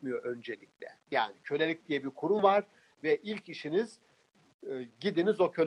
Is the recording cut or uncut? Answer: uncut